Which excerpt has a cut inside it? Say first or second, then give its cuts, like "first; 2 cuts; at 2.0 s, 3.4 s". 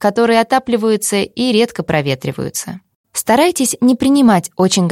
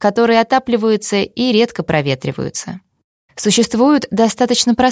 first; 1 cut; at 2.9 s